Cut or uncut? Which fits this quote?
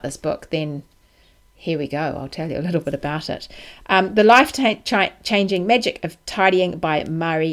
uncut